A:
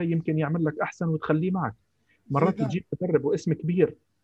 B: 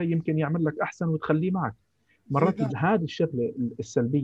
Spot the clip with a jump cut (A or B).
B